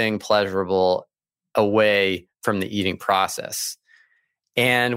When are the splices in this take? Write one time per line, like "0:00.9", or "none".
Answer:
none